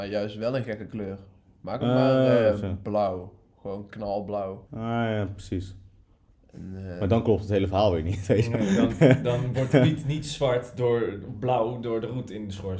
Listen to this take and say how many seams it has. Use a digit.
1